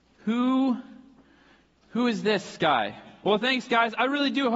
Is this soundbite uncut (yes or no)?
no